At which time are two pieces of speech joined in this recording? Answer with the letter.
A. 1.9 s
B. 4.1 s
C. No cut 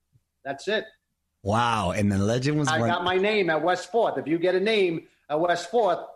C